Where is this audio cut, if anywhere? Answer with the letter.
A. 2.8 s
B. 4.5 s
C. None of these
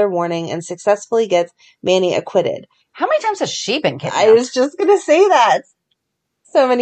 A